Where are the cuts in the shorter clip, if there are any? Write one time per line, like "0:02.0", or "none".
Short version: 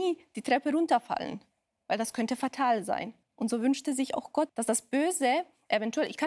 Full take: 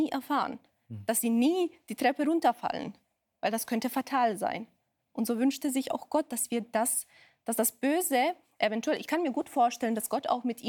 0:03.2
0:04.5